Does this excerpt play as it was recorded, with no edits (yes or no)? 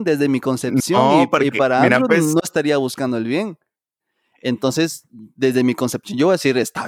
no